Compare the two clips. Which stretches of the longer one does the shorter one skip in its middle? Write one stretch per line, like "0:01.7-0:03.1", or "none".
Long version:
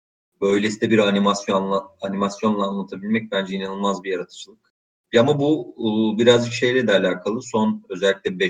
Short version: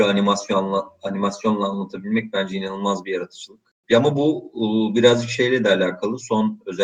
0:04.8-0:05.1